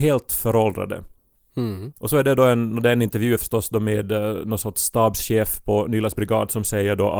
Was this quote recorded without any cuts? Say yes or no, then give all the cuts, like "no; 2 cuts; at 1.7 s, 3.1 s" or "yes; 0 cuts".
yes; 0 cuts